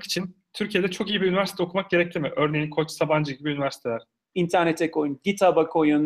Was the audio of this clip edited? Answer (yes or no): yes